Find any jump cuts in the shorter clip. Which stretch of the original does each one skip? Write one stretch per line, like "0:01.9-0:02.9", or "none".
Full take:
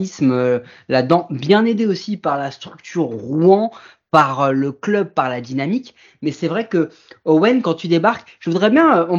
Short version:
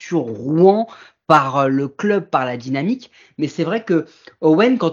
none